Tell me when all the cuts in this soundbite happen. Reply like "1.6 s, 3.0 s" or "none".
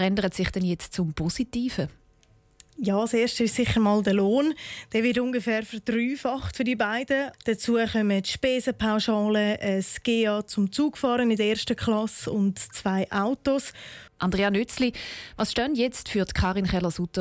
7.3 s, 14.1 s

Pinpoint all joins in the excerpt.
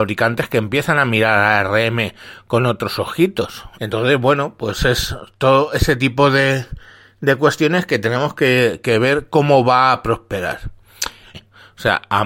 3.7 s, 11.3 s

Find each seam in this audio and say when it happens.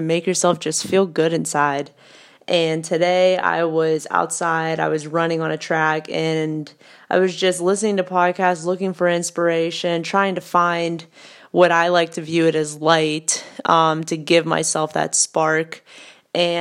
none

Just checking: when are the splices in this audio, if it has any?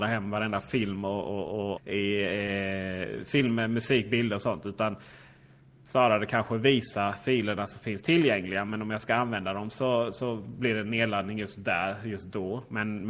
1.8 s

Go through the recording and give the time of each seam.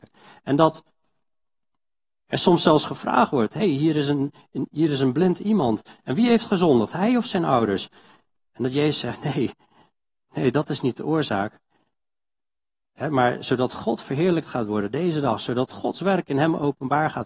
none

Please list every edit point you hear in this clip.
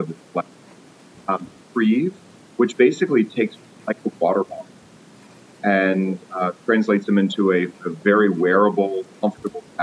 1.6 s

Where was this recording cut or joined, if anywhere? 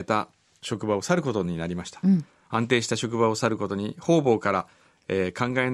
none

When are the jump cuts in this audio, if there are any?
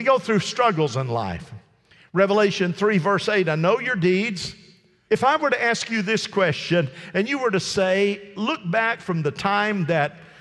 5.1 s

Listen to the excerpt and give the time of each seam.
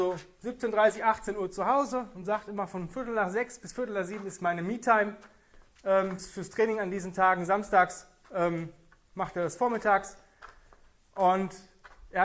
6.2 s

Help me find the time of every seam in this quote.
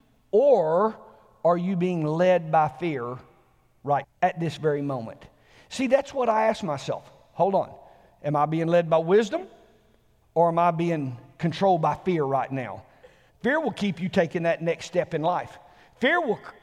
4.0 s, 13.3 s

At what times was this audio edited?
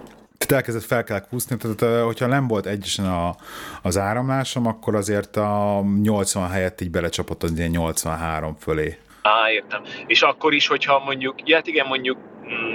none

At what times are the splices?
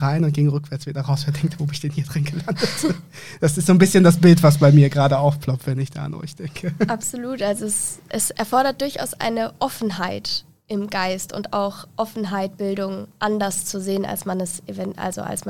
none

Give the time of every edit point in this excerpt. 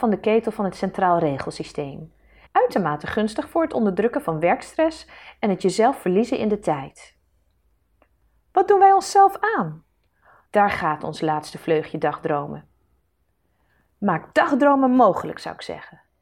2.5 s, 10.5 s

